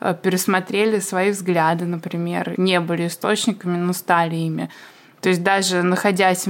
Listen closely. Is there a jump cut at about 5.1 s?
no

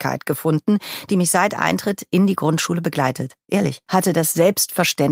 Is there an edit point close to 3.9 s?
yes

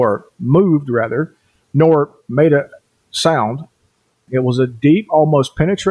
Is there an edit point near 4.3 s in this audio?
yes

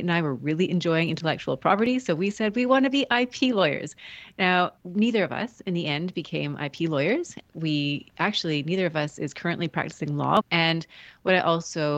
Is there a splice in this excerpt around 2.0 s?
no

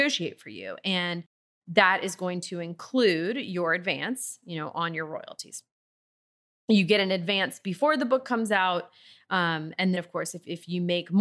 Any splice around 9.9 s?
yes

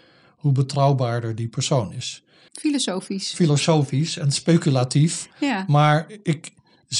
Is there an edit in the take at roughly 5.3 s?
no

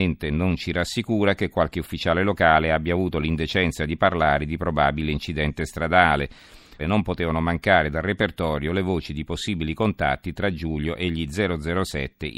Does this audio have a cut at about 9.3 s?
no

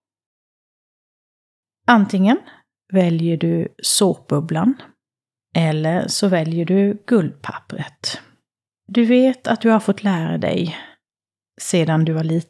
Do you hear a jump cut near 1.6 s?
no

